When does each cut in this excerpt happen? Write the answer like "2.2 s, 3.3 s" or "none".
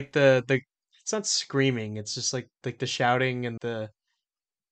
3.6 s

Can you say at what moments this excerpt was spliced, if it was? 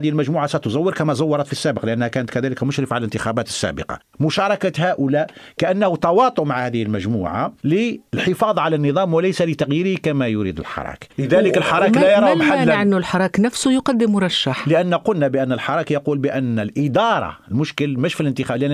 4.1 s

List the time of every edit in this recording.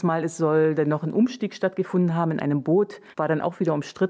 3.1 s

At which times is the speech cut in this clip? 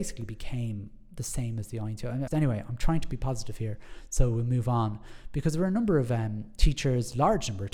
2.3 s

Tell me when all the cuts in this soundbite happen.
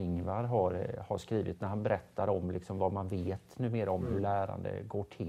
none

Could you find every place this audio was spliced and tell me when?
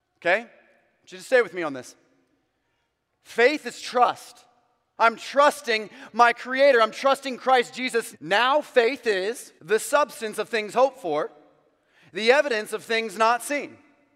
5.0 s, 8.1 s, 9.6 s

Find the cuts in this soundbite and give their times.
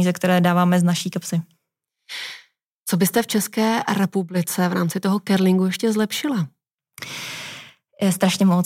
none

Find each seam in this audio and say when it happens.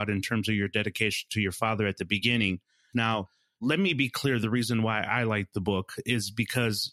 2.9 s

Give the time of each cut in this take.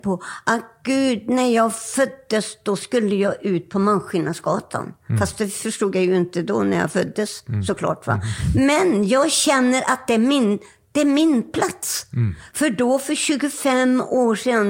none

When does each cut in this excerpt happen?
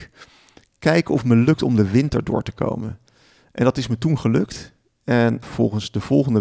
5.4 s

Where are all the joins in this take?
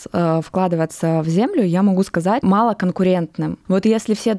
2.4 s

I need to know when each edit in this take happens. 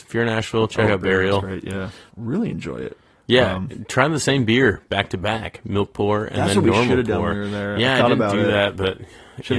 2.1 s

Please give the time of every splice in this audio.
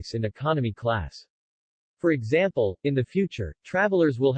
none

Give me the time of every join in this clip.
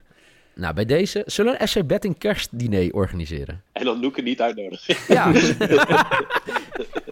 3.7 s

